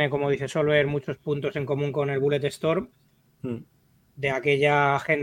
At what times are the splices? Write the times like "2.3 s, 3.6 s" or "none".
none